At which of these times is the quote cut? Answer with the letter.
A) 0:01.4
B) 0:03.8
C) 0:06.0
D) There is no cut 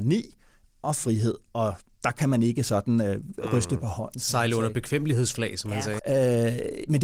C